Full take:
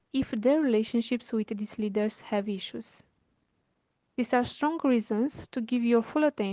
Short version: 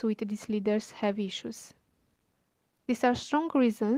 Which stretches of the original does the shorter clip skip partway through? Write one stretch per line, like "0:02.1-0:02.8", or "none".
none